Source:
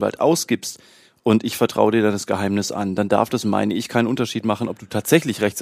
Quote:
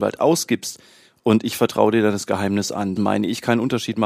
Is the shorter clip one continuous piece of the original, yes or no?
no